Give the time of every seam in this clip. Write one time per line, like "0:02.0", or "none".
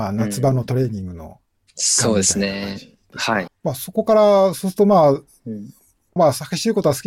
0:03.5
0:06.2